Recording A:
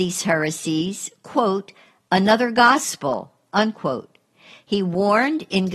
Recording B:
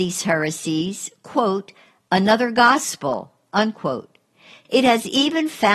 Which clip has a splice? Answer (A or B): B